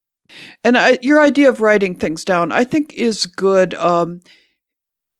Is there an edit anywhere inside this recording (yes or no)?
no